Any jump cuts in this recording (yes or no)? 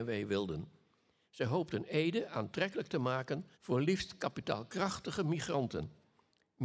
yes